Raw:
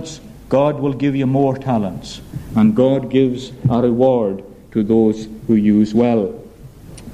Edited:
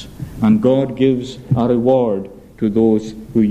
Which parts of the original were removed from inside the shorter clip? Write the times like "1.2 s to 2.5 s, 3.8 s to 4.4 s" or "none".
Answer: none